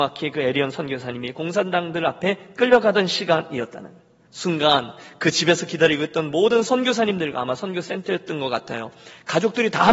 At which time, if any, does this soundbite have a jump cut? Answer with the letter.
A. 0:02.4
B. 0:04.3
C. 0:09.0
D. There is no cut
B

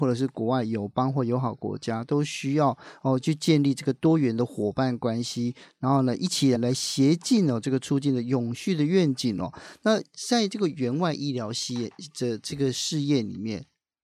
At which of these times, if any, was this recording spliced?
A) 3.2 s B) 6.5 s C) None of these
B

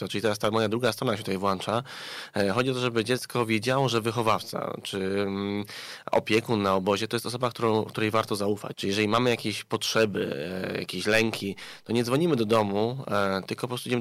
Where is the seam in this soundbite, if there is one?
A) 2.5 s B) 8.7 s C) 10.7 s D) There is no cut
B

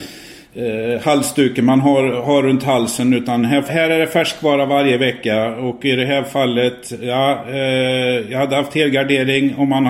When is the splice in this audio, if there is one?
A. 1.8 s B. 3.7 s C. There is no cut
B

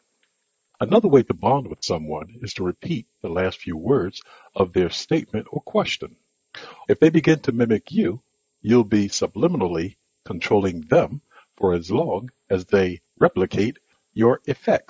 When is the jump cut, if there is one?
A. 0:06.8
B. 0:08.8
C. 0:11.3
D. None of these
A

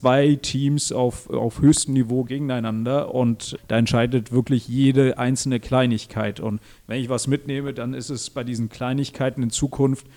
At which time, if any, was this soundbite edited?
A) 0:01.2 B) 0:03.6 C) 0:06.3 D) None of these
B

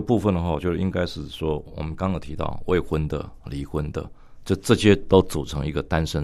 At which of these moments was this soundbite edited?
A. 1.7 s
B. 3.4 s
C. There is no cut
C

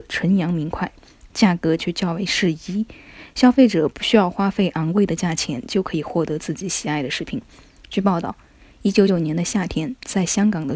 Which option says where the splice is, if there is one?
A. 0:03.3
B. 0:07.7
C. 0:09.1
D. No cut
C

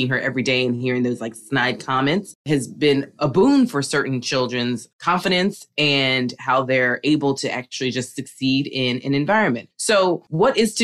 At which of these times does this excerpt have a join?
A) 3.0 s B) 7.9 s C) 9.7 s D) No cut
D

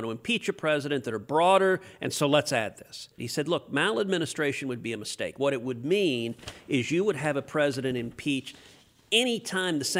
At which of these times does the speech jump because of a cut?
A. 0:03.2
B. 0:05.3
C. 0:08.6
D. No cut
A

